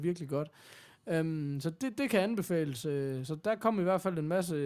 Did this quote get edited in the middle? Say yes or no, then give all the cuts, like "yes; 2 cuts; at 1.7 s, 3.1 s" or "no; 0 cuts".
no; 0 cuts